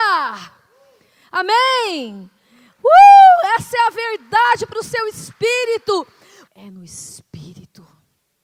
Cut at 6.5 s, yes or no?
yes